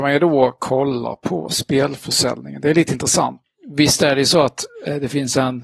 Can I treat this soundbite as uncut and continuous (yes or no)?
yes